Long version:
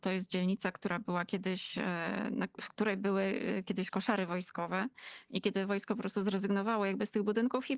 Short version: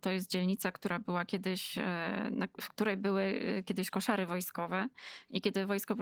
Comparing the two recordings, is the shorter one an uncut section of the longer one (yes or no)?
yes